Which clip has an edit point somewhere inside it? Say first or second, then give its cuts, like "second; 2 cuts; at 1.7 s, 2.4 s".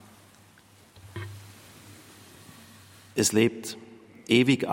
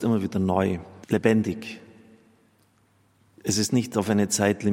second; 1 cut; at 1.0 s